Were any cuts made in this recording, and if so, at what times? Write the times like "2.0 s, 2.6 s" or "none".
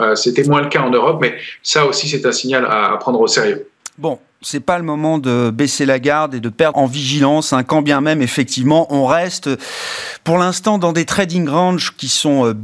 6.7 s